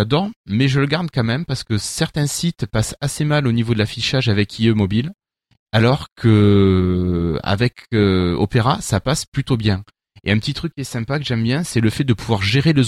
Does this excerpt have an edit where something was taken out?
no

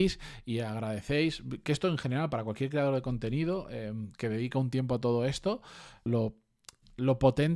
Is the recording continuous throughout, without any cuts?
no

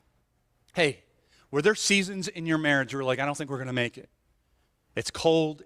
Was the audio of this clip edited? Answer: no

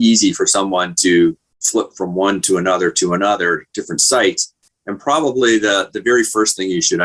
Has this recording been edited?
yes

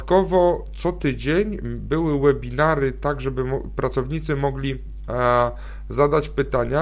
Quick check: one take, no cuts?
yes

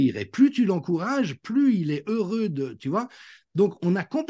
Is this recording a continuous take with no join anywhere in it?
yes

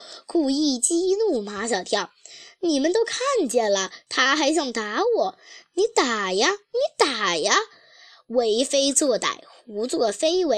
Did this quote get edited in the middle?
no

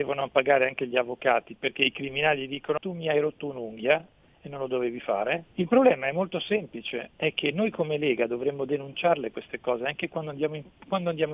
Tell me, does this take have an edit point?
yes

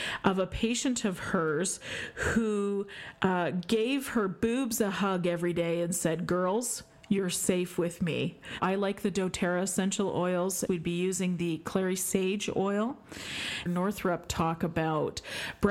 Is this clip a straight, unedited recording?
no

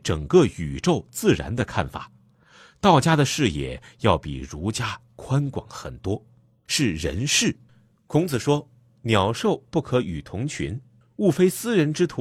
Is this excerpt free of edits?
no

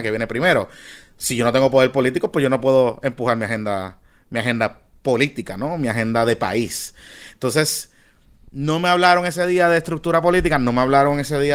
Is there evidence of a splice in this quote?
no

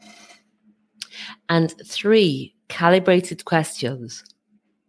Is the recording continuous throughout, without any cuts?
yes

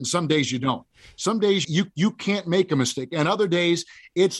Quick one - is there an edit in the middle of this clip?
yes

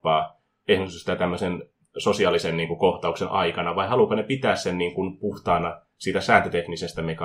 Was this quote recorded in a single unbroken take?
yes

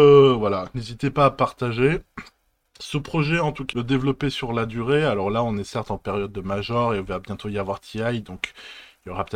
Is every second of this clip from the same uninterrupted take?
no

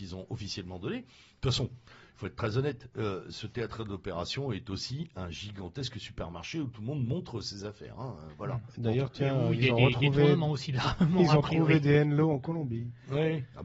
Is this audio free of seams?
yes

